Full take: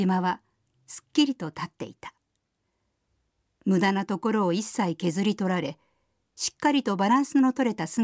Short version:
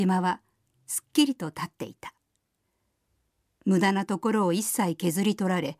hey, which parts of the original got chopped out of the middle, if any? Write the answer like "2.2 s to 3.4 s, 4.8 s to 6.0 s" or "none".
none